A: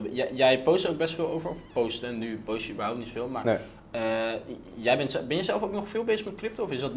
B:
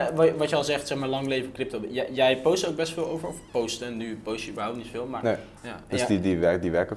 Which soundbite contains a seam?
B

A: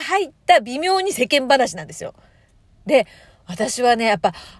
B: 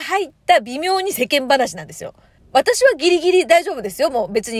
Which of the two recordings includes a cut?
B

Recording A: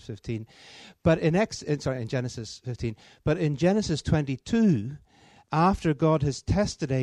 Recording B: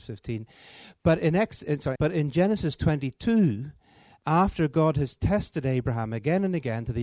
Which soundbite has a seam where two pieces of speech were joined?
B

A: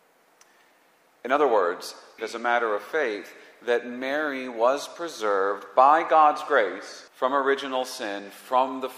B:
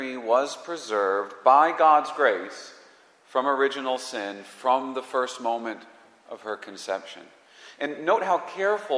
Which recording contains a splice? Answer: A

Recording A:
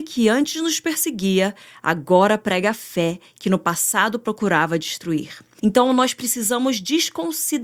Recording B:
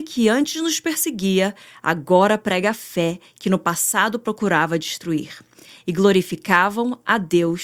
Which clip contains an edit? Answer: A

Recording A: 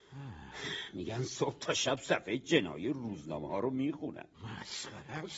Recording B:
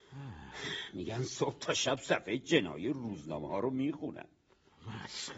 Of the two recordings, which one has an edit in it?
A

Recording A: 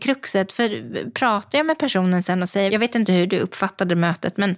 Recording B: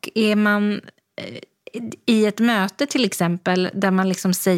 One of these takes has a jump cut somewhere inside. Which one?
A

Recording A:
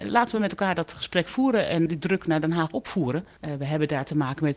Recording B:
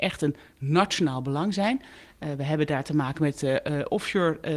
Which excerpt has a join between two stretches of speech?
A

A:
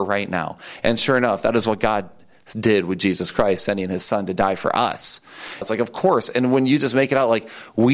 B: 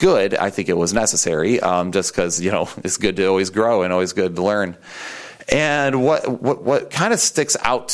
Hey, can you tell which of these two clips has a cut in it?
A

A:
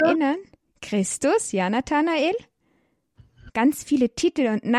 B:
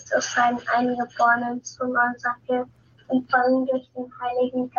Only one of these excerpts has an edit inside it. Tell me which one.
A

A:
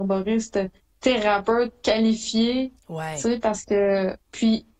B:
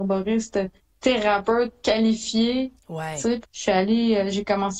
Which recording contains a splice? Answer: B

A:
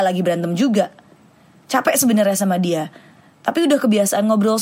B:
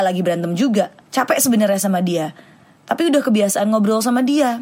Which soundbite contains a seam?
B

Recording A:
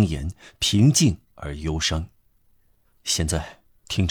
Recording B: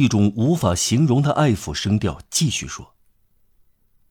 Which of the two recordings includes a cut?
A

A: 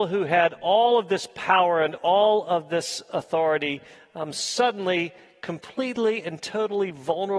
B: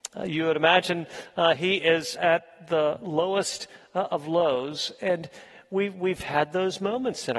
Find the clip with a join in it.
B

